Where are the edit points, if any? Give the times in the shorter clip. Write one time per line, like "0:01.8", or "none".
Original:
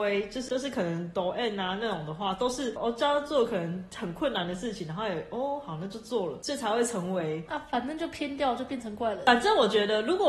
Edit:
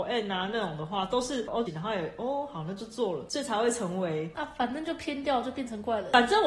0:01.7